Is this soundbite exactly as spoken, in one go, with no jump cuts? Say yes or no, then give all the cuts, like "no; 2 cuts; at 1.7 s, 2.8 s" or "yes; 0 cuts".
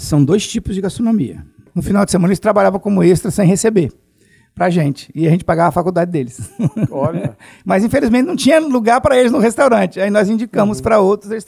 no; 1 cut; at 1.7 s